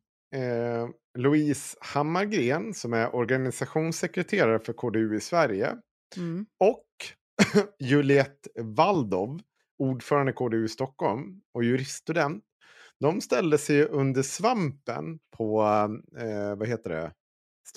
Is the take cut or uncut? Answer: uncut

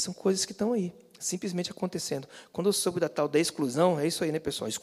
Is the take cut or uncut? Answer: uncut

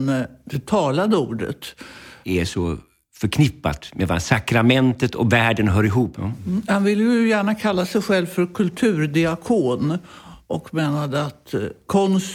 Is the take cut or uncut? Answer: cut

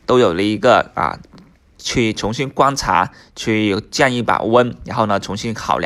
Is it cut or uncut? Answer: uncut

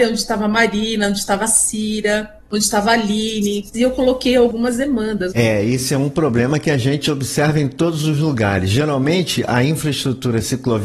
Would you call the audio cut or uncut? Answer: cut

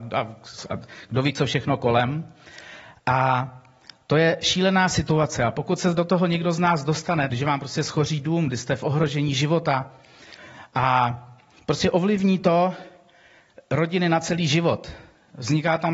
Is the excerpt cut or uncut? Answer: cut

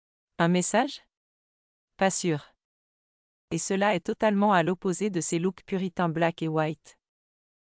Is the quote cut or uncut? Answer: cut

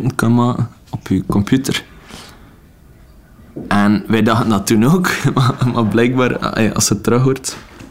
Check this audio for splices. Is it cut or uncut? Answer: uncut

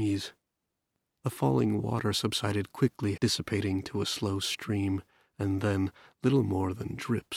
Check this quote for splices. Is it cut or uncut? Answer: cut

